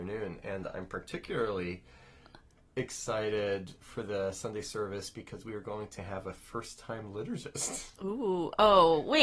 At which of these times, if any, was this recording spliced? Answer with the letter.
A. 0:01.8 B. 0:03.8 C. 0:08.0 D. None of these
B